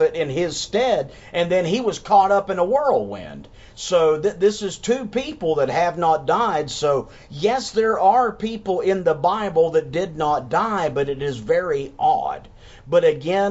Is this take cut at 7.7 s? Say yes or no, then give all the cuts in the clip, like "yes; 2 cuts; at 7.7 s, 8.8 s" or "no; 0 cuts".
no; 0 cuts